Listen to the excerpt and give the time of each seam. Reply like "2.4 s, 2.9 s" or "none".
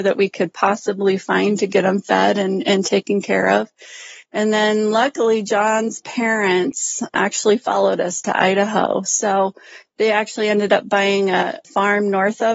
none

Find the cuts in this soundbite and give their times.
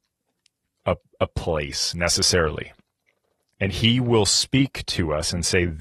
3.5 s

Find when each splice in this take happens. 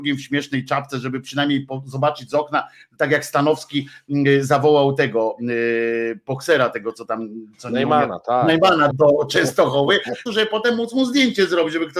8.9 s, 10.3 s

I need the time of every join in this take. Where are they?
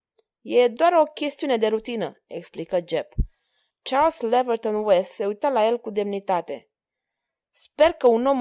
3.7 s

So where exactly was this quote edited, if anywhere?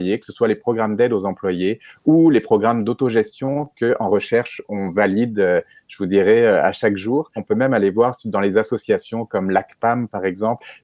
7.4 s

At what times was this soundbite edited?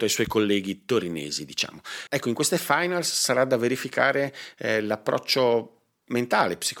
2.1 s

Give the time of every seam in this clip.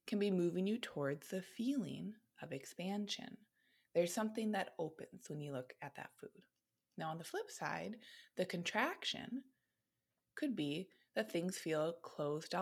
none

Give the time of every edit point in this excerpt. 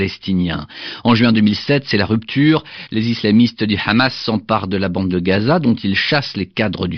none

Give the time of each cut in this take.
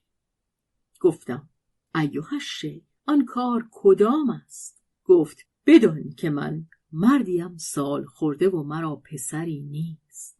3.0 s, 4.9 s

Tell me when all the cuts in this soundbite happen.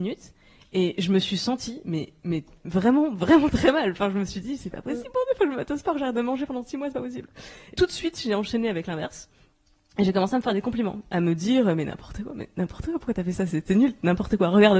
7.7 s

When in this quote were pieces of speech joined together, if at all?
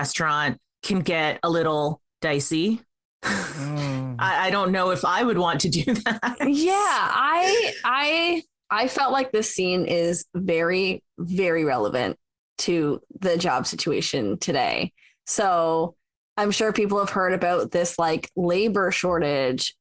none

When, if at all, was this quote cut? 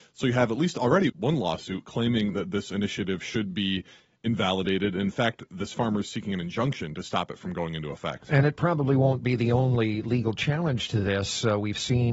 1.1 s

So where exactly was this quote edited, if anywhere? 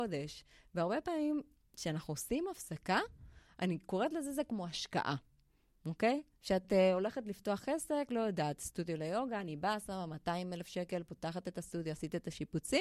none

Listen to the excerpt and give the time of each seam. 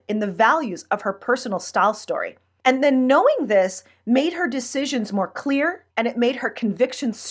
2.6 s, 5.9 s

